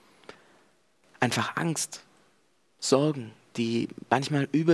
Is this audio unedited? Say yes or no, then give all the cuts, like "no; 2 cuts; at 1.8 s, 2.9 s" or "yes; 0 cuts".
yes; 0 cuts